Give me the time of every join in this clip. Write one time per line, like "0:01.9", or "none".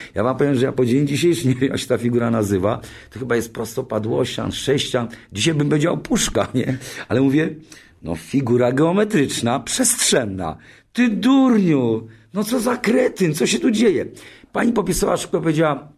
none